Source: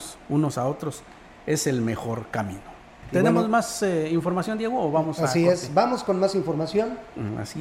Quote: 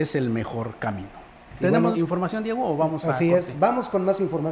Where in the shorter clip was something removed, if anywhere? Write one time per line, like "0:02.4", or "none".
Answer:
0:01.9